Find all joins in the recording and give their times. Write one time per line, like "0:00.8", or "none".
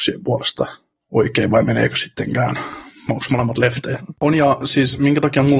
0:04.1